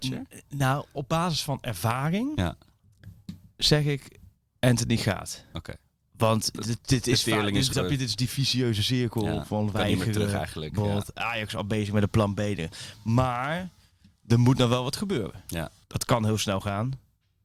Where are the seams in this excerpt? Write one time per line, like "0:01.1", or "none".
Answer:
0:07.7
0:15.8